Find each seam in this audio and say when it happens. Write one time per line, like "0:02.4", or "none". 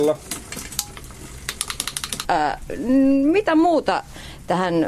0:02.2